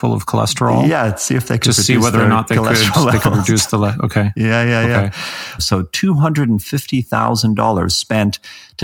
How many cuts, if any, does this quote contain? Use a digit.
1